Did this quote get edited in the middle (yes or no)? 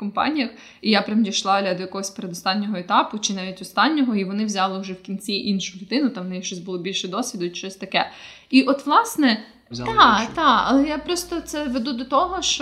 yes